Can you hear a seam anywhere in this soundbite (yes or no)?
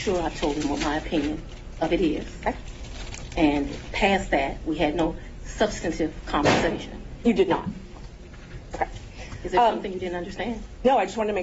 no